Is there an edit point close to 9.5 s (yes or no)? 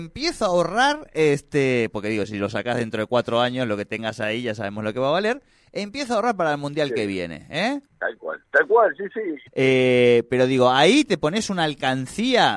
yes